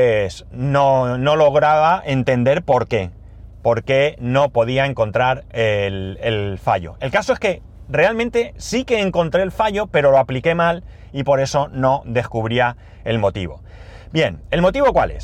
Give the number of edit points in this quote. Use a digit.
0